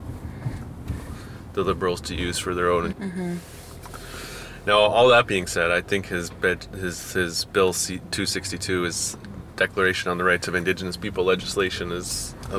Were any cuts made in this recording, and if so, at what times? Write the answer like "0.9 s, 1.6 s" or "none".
2.9 s